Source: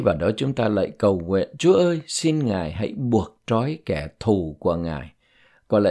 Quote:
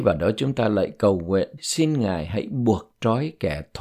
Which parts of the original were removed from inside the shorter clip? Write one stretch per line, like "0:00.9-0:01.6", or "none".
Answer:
0:01.6-0:02.0